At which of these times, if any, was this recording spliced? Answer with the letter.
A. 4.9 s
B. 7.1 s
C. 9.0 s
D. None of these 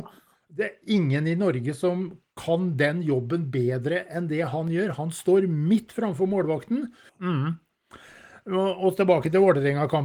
B